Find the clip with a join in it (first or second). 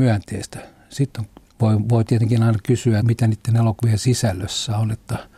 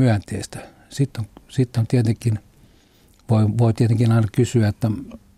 first